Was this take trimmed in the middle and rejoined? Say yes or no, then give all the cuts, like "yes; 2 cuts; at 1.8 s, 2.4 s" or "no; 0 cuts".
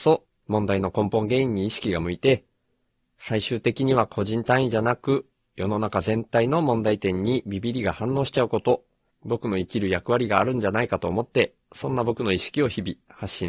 yes; 2 cuts; at 9.1 s, 11.6 s